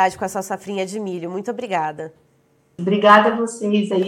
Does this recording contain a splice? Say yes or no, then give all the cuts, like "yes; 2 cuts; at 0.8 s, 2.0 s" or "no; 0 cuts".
yes; 1 cut; at 2.8 s